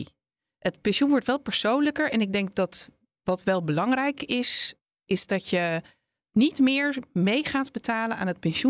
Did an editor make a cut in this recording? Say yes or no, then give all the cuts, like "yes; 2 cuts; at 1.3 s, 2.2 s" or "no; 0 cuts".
no; 0 cuts